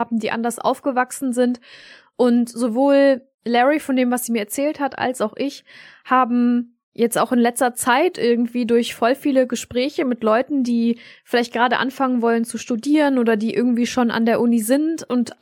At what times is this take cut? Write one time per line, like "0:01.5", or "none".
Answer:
none